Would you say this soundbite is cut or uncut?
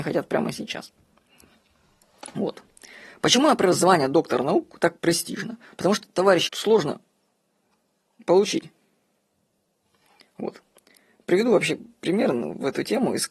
cut